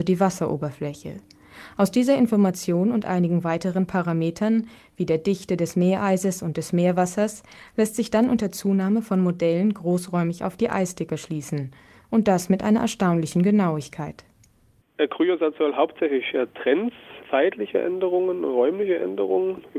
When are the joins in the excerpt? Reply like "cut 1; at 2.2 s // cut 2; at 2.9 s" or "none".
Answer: cut 1; at 17.2 s